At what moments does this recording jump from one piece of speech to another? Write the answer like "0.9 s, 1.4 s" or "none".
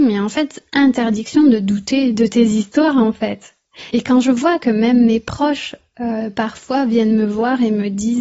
3.9 s

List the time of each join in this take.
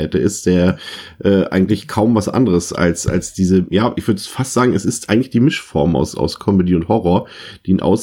none

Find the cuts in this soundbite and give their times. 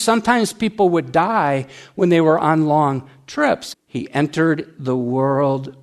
3.7 s

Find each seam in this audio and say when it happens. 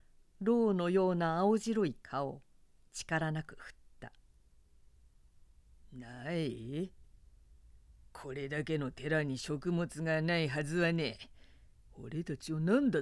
none

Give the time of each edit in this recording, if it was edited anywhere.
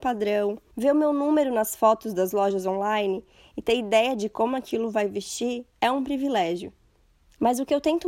none

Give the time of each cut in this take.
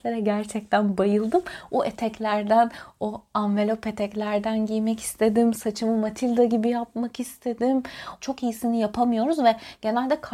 8.2 s

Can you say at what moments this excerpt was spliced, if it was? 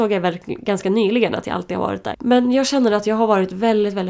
2.1 s

